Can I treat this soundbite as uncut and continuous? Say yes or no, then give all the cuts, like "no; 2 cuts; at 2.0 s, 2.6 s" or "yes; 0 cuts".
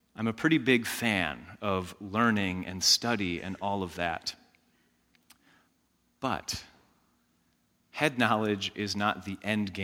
yes; 0 cuts